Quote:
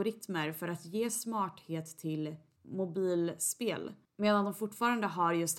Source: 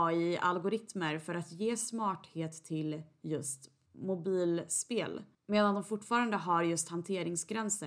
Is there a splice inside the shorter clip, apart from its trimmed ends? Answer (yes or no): yes